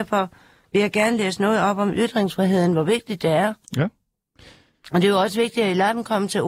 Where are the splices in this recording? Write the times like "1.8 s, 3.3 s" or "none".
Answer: 3.6 s